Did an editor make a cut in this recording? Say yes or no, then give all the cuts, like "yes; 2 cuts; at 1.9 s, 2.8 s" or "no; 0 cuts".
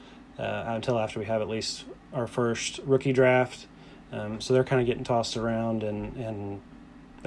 no; 0 cuts